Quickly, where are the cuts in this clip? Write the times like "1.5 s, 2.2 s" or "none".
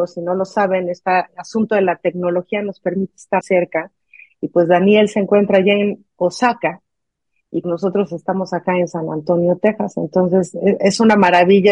3.4 s, 7.6 s